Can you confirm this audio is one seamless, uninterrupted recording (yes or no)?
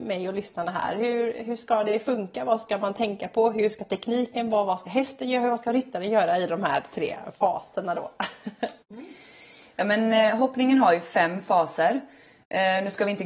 no